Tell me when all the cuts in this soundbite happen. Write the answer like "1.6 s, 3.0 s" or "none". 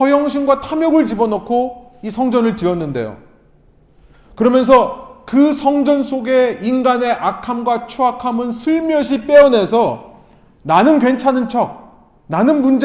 none